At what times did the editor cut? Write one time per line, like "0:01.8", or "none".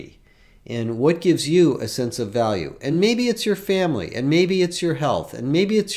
none

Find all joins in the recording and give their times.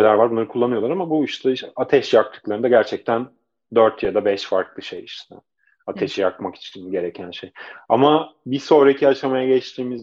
none

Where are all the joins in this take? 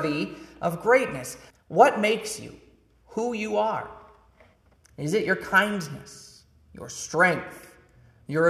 0:01.5

